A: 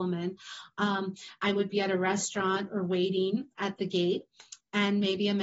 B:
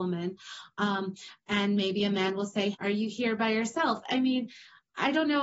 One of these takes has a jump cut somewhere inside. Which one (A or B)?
B